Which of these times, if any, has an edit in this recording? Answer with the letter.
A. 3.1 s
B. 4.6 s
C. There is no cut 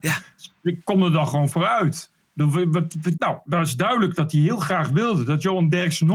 A